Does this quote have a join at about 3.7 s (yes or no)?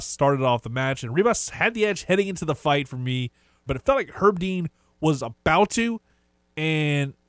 yes